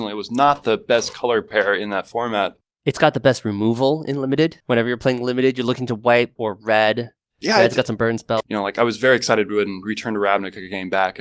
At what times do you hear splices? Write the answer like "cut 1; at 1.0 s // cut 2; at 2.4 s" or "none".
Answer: cut 1; at 6.4 s // cut 2; at 8.4 s